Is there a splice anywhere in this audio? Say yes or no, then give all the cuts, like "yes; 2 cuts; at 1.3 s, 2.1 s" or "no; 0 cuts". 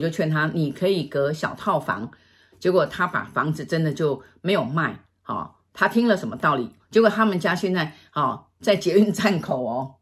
yes; 1 cut; at 6.8 s